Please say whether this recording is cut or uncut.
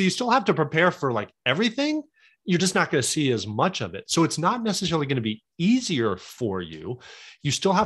uncut